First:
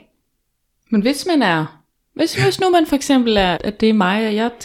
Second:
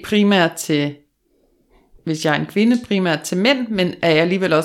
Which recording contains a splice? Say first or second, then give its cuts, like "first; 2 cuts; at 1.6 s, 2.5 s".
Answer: first; 1 cut; at 3.5 s